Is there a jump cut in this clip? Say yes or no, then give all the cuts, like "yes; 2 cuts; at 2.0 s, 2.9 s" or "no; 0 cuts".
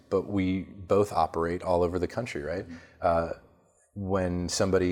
no; 0 cuts